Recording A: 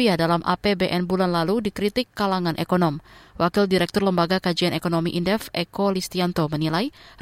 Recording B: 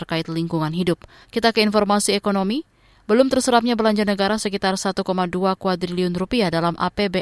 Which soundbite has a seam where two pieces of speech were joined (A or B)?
B